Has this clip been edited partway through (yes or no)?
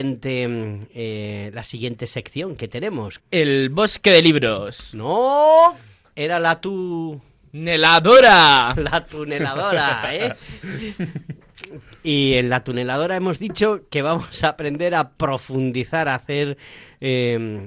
yes